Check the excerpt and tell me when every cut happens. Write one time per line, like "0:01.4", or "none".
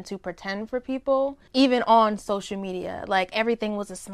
0:01.5